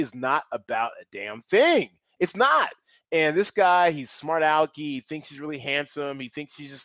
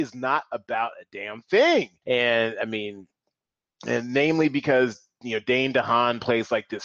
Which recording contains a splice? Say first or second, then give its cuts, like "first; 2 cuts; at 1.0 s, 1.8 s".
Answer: second; 1 cut; at 2.0 s